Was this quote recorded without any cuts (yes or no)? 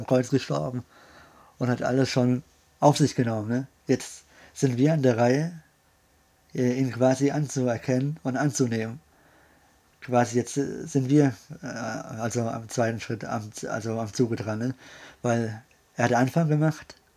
yes